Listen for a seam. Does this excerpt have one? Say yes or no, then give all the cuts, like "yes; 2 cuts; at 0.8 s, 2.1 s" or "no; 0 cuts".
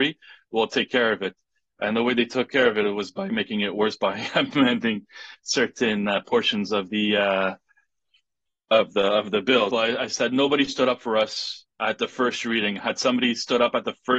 yes; 1 cut; at 9.7 s